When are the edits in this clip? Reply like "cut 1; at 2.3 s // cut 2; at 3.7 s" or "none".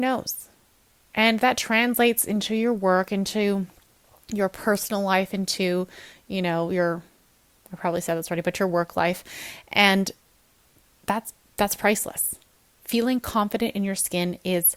none